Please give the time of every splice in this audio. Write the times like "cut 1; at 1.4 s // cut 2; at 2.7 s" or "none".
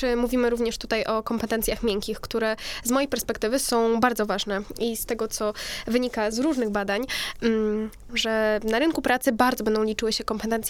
cut 1; at 6.3 s // cut 2; at 8.1 s